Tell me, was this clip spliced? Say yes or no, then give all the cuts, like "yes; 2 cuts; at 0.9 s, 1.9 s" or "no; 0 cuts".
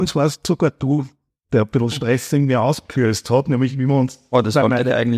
no; 0 cuts